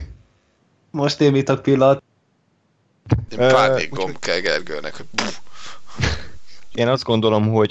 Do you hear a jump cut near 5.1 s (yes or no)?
no